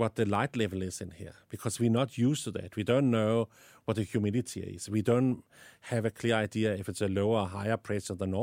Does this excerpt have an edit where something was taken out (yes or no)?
no